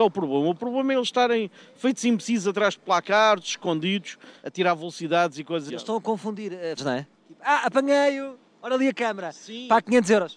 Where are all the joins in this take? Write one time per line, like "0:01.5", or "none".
0:05.7
0:06.8